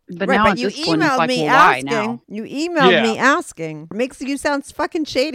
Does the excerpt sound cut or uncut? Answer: cut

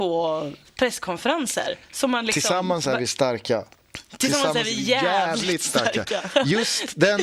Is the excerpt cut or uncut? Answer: uncut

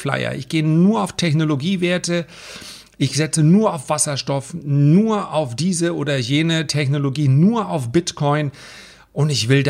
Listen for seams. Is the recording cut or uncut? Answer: uncut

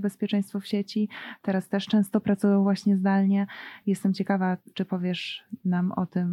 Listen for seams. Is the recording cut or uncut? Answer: uncut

